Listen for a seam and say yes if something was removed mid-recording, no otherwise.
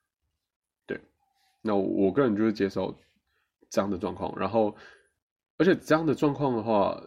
no